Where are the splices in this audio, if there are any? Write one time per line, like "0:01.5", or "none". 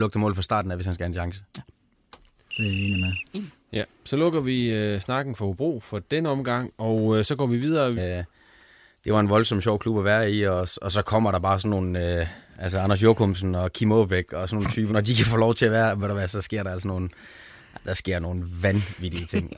0:08.0
0:14.9